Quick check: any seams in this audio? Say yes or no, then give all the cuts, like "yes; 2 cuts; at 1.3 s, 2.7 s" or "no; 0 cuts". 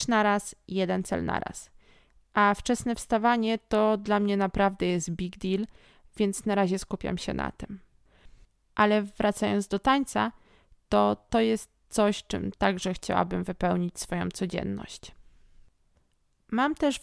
no; 0 cuts